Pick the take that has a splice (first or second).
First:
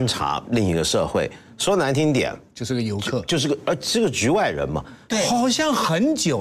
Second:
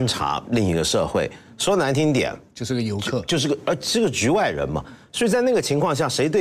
first